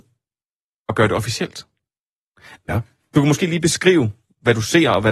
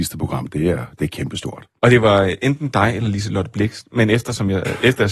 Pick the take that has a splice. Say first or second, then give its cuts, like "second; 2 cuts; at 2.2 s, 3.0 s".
first; 1 cut; at 2.6 s